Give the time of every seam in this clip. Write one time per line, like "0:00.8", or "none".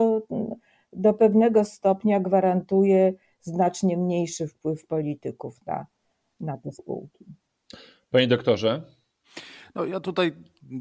none